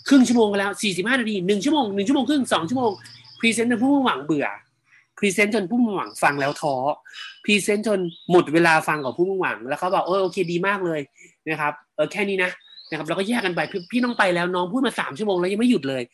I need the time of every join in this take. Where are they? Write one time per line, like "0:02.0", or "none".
none